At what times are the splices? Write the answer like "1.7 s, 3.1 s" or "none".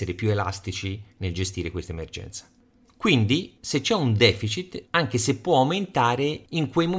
4.8 s